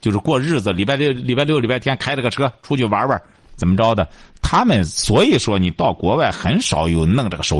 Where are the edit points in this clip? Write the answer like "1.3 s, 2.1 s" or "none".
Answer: none

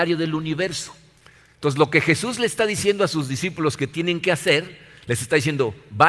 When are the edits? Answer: none

